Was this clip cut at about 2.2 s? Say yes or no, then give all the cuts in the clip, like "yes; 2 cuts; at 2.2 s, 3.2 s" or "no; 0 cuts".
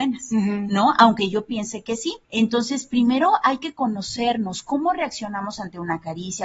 yes; 1 cut; at 2.2 s